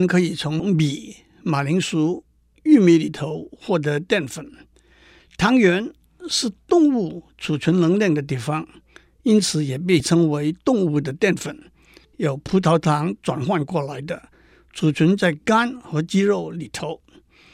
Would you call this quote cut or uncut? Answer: cut